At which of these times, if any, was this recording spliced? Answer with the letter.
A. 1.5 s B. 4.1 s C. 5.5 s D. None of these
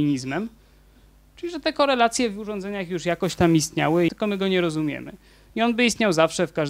B